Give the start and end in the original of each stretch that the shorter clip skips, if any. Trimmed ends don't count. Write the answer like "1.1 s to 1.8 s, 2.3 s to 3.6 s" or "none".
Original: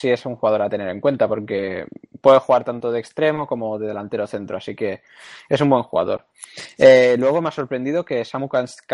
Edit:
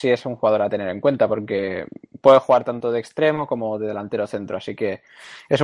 none